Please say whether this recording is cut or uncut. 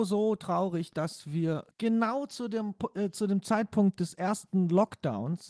cut